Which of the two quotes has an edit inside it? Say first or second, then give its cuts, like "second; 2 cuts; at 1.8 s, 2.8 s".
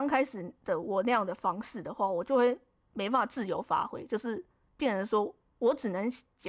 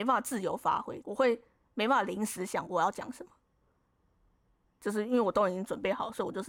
second; 1 cut; at 1.0 s